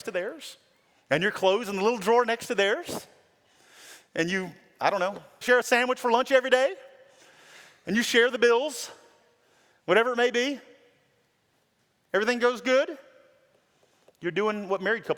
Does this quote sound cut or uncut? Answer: cut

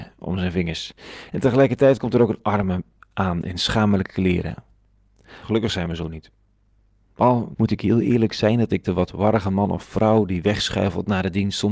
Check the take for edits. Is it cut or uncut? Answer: cut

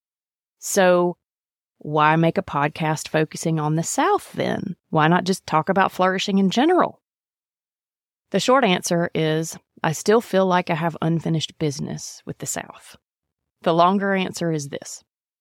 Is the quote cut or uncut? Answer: uncut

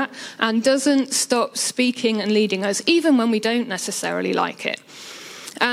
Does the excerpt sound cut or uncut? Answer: uncut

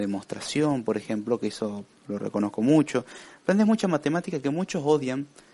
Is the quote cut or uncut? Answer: uncut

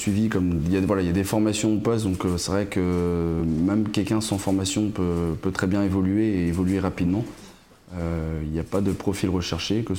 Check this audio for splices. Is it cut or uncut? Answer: uncut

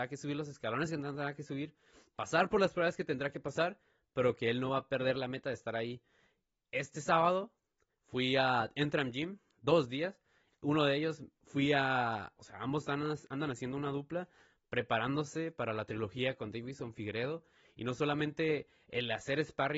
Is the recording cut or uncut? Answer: cut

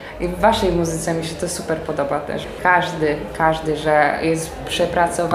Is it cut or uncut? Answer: cut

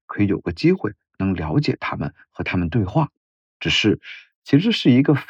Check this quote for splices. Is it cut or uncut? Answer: cut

